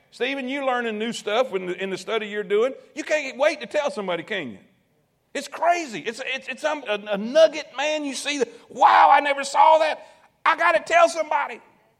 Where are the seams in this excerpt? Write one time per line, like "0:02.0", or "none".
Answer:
0:06.9